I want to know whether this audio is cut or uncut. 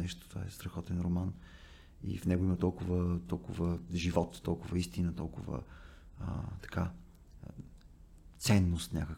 uncut